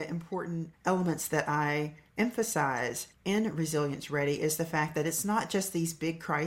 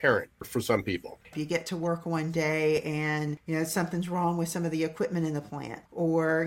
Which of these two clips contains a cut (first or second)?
second